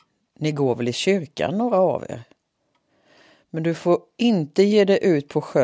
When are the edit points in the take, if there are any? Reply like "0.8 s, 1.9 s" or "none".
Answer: none